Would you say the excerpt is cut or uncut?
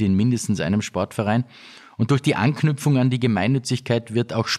uncut